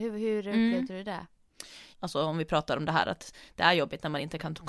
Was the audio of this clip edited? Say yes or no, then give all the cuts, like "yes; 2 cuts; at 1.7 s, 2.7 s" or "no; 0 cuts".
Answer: yes; 1 cut; at 1.9 s